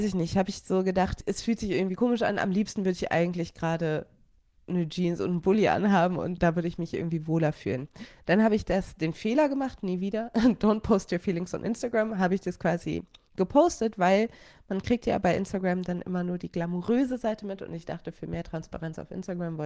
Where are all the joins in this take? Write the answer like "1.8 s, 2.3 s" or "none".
none